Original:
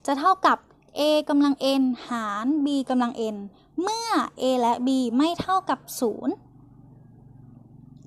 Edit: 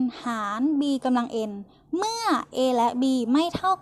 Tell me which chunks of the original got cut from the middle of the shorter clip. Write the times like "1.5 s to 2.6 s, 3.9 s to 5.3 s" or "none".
none